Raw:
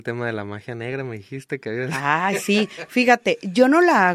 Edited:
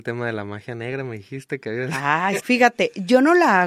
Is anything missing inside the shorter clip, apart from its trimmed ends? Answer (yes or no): yes